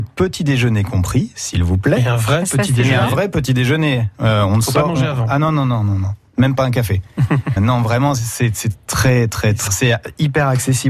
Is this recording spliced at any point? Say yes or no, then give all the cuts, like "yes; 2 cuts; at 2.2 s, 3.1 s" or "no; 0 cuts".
yes; 2 cuts; at 7.6 s, 9.7 s